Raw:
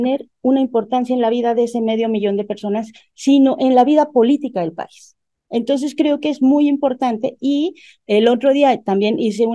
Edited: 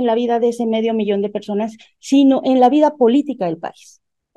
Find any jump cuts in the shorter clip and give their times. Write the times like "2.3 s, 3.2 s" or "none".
none